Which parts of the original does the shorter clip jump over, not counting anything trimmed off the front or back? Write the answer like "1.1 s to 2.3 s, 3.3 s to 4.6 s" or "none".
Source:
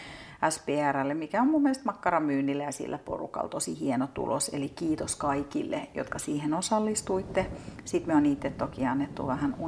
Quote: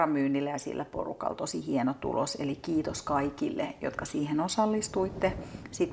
none